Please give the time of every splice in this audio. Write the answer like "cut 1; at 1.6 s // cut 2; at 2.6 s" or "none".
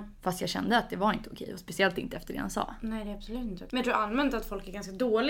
cut 1; at 3.7 s